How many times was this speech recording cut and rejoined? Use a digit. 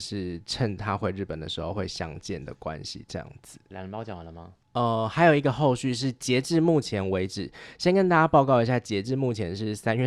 1